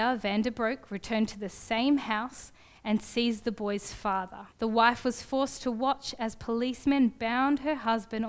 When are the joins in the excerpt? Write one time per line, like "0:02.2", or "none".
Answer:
0:04.5